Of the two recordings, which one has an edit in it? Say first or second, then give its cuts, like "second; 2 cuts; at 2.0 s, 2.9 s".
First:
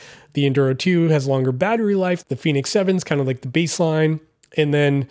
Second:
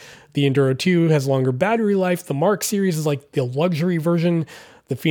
first; 1 cut; at 2.2 s